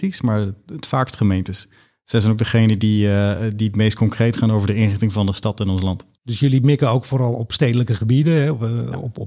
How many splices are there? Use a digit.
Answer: 1